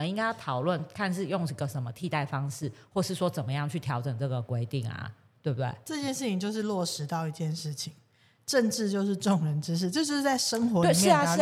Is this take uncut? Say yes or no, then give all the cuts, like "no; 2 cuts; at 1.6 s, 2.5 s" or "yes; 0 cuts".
yes; 0 cuts